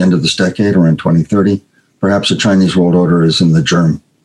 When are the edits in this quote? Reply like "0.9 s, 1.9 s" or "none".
none